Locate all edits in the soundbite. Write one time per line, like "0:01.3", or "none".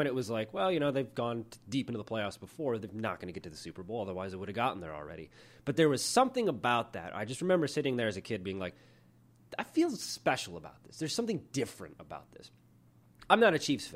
none